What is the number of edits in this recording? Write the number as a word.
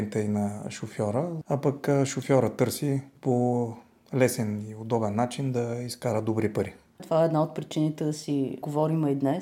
two